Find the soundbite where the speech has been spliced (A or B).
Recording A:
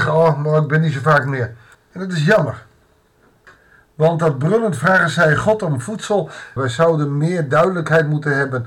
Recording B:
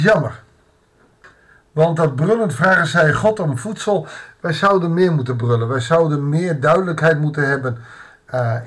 A